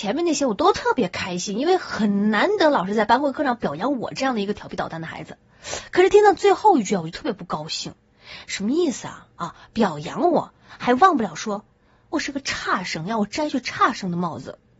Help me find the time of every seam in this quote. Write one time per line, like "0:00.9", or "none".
none